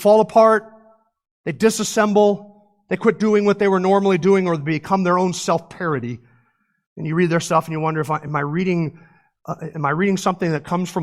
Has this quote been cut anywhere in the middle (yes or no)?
no